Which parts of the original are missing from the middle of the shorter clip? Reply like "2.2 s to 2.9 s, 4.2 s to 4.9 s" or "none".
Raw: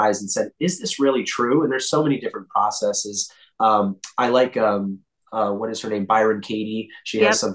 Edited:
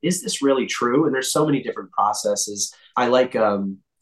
3.5 s to 4.2 s

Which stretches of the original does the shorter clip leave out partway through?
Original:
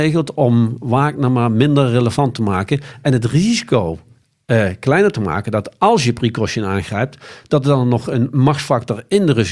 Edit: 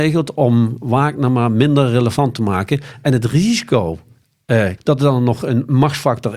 4.8 s to 7.4 s

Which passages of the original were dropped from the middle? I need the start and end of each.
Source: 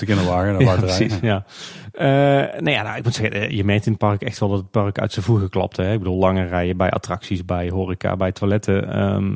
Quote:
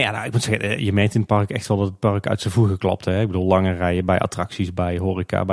none

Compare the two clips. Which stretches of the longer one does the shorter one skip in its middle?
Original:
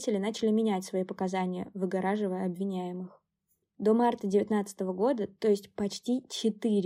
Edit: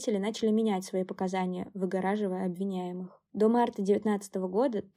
3.3 s to 3.7 s

